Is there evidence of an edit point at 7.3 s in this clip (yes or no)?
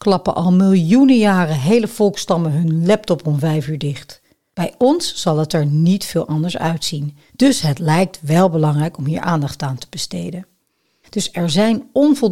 yes